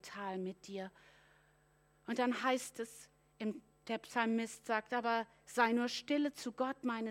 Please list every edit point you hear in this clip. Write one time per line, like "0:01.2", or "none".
none